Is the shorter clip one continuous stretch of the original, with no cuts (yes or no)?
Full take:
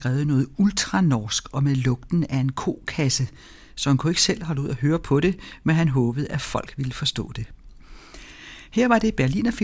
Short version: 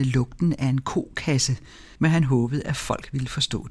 no